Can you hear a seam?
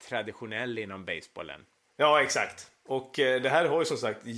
no; 0 cuts

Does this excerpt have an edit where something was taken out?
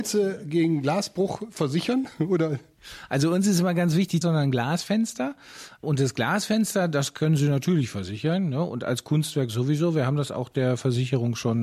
yes; 1 cut; at 4.2 s

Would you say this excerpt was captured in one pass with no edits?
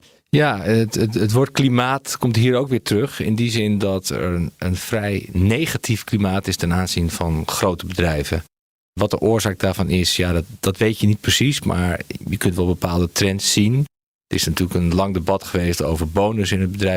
yes; 0 cuts

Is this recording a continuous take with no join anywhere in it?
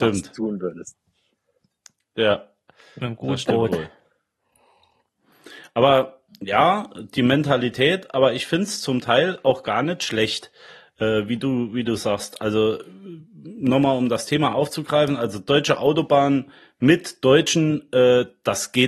yes; 0 cuts

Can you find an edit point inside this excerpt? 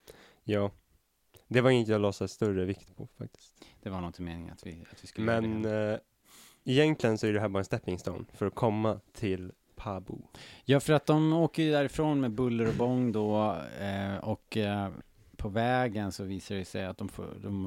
no; 0 cuts

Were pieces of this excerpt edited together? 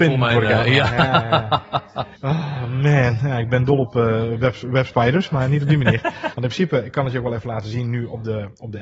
yes; 2 cuts; at 2.1 s, 6.3 s

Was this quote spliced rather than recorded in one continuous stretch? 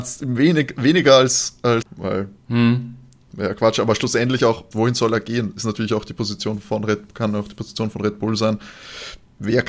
yes; 2 cuts; at 1.8 s, 4.7 s

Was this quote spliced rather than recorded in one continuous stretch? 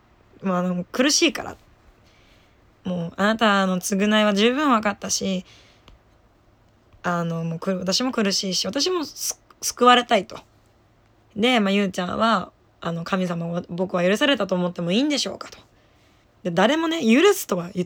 yes; 2 cuts; at 11.2 s, 16.2 s

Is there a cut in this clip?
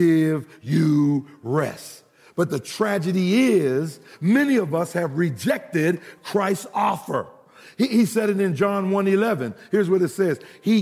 no; 0 cuts

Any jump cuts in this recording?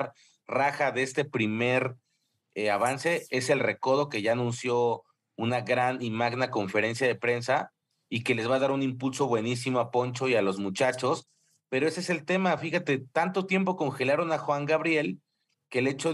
no; 0 cuts

